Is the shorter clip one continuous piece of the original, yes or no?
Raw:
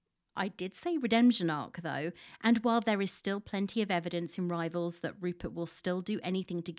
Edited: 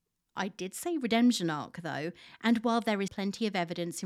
no